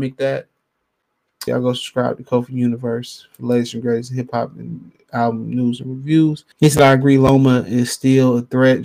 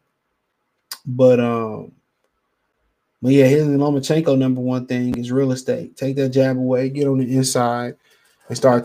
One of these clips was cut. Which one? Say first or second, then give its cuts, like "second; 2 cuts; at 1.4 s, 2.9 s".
first; 2 cuts; at 1.5 s, 6.5 s